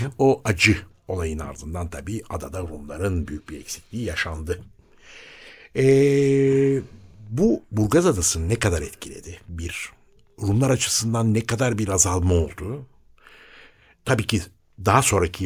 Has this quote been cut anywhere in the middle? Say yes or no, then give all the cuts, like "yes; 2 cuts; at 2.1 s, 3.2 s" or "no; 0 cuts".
no; 0 cuts